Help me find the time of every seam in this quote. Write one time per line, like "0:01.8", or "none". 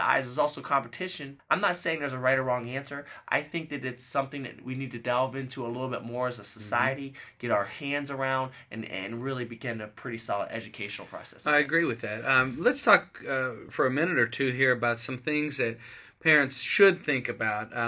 0:01.4
0:13.7